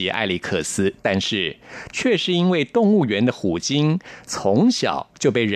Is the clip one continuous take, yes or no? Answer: no